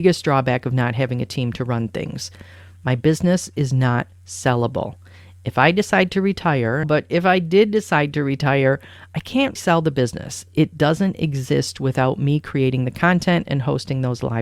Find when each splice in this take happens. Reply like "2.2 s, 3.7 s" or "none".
6.8 s, 9.6 s